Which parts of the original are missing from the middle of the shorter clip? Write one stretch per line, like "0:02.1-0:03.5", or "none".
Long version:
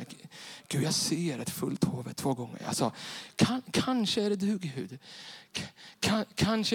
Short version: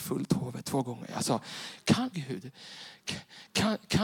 0:03.6-0:04.6